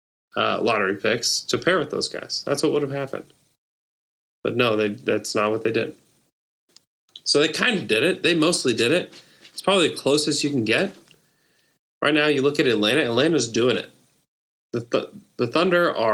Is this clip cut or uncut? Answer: uncut